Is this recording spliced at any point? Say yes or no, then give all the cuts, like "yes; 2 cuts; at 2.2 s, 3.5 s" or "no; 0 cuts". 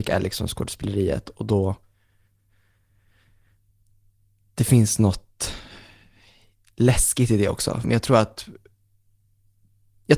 yes; 1 cut; at 7.8 s